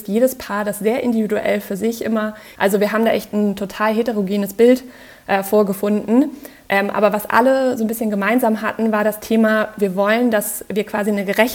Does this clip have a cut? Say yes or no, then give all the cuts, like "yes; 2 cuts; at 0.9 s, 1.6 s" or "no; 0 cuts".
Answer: yes; 2 cuts; at 2.5 s, 7.3 s